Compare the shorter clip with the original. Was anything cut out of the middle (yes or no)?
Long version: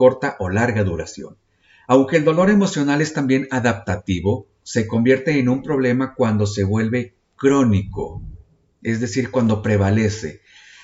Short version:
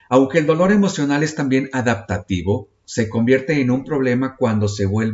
no